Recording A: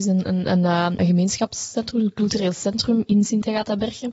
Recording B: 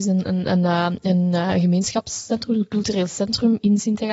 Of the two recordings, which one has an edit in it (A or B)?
A